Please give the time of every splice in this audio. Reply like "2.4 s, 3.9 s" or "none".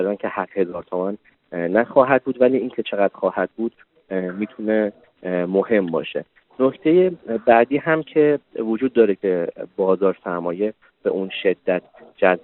none